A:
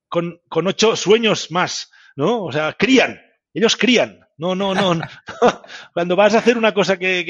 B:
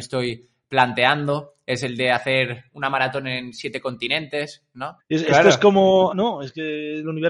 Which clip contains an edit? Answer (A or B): B